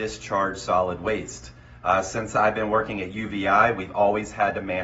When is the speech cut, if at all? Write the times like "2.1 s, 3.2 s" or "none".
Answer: none